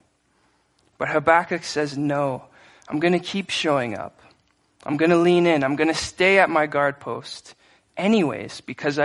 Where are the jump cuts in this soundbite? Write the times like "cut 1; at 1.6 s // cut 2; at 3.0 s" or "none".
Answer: none